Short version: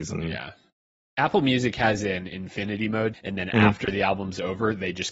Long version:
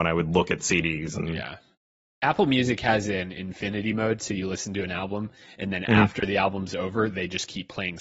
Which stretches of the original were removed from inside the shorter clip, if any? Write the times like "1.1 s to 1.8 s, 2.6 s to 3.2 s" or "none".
4.2 s to 5.5 s